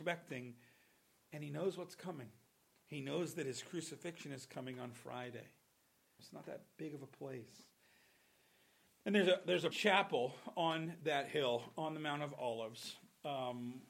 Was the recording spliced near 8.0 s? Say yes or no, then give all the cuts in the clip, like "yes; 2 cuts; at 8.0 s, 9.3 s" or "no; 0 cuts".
no; 2 cuts; at 6.2 s, 9.7 s